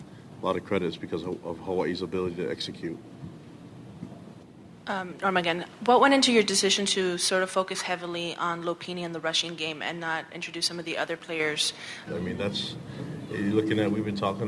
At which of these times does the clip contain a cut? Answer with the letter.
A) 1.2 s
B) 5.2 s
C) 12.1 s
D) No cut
C